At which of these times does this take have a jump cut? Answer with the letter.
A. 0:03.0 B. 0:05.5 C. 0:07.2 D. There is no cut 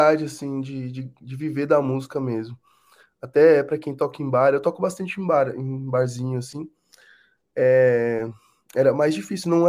D